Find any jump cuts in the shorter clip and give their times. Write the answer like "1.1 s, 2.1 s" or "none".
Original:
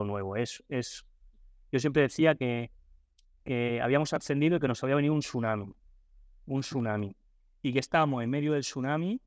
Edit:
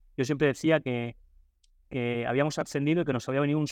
none